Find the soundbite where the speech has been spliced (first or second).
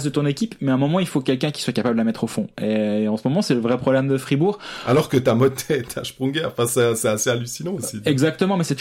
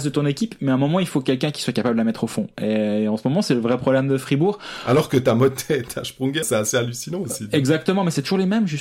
second